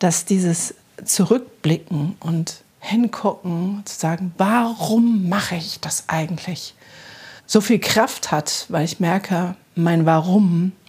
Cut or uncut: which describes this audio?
cut